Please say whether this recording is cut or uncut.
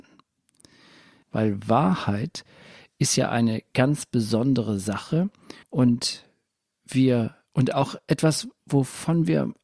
cut